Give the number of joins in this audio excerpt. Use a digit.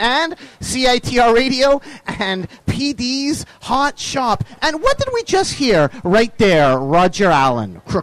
0